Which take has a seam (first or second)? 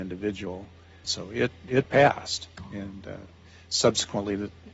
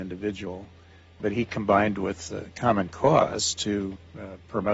first